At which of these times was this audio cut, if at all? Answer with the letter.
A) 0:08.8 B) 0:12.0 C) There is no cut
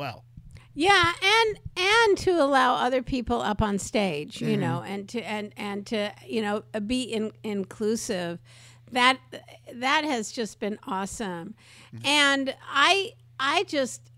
C